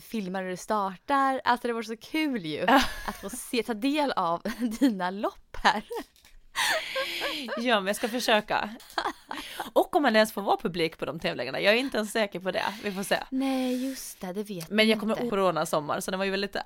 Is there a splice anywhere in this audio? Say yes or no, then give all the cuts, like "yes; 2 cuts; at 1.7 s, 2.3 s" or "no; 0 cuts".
yes; 2 cuts; at 8.8 s, 15.3 s